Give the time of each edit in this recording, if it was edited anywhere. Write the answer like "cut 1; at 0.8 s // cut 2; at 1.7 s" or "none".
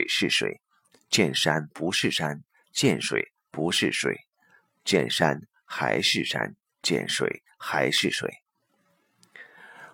none